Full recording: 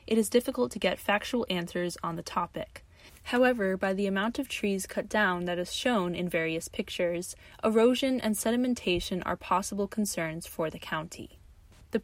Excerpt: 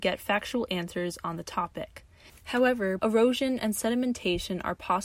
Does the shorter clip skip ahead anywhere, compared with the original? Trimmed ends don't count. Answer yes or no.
yes